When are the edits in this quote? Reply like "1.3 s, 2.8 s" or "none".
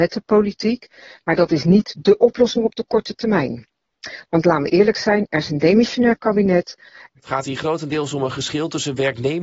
1.2 s, 7.2 s